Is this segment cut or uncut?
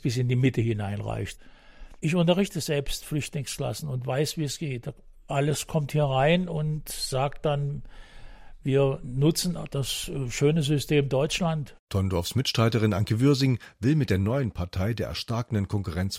cut